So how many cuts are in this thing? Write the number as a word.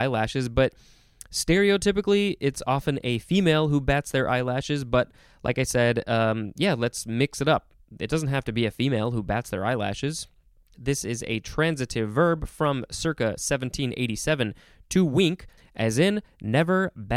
two